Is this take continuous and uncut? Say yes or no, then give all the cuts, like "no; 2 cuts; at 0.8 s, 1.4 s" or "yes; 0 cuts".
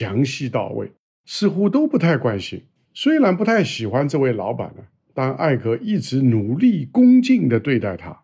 no; 2 cuts; at 1.1 s, 2.8 s